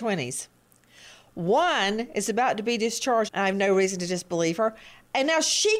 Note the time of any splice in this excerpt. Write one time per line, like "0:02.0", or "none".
0:03.3